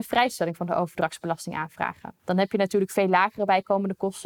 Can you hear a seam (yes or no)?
yes